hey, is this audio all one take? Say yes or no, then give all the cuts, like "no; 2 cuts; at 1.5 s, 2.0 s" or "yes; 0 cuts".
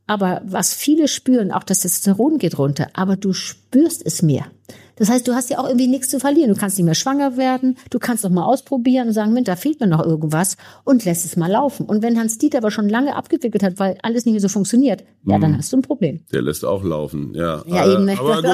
no; 1 cut; at 9.5 s